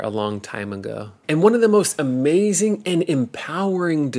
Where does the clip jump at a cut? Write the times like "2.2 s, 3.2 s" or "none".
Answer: 1.2 s